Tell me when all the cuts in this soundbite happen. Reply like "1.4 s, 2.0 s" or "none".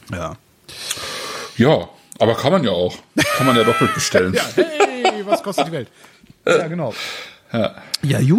none